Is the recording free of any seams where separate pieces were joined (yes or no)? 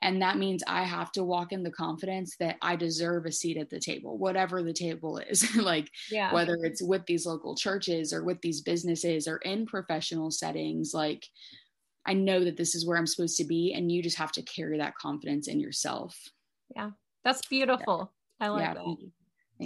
yes